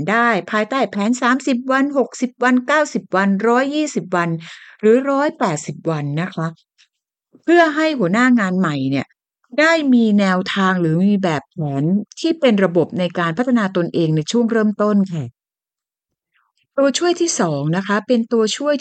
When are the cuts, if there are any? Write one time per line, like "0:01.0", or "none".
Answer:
none

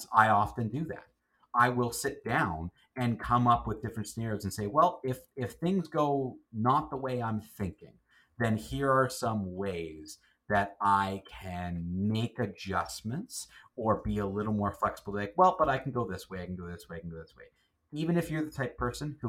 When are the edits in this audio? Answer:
none

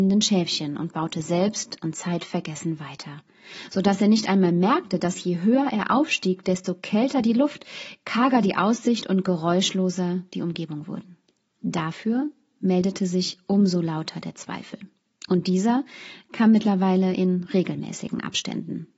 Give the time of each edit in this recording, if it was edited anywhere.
none

